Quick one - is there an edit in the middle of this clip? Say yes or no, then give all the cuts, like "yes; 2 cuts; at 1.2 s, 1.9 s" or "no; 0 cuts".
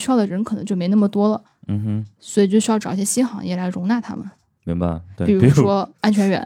no; 0 cuts